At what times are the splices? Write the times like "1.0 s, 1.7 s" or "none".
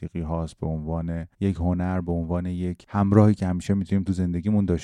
1.3 s